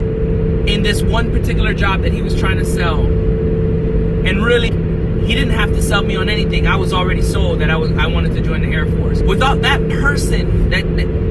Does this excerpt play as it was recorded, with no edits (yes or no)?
no